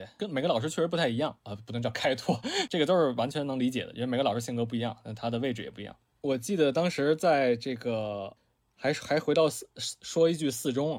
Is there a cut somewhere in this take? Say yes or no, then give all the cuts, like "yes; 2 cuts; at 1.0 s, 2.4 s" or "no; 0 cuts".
yes; 3 cuts; at 1.4 s, 2.7 s, 6.2 s